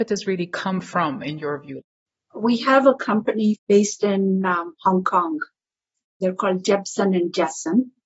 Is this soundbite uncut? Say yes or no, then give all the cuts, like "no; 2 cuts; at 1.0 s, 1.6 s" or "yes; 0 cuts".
yes; 0 cuts